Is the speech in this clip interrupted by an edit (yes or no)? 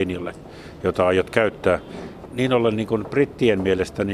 yes